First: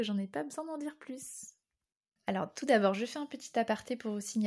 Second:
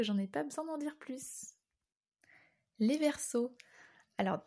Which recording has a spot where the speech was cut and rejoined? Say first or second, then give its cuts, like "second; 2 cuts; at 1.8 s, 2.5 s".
first; 1 cut; at 2.2 s